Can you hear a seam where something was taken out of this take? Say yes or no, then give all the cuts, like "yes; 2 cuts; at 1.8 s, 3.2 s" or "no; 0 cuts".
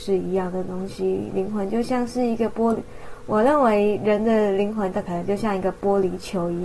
no; 0 cuts